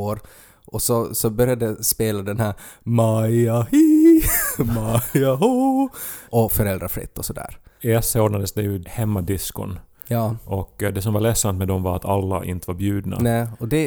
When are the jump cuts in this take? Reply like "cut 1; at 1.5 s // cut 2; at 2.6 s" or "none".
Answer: cut 1; at 6.3 s